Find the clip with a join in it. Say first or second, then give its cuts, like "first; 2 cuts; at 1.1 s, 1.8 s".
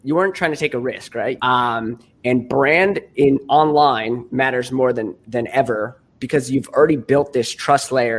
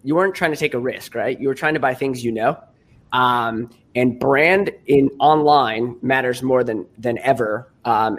first; 2 cuts; at 1.4 s, 6.1 s